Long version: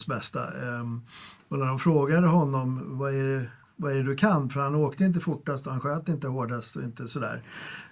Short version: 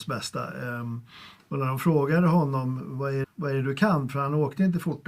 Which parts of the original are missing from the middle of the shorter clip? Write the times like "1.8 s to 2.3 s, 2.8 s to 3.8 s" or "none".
3.2 s to 3.6 s